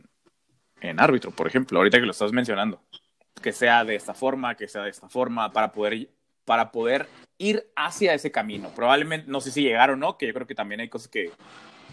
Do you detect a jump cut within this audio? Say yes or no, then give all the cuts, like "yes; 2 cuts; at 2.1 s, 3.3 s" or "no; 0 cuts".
yes; 1 cut; at 3.3 s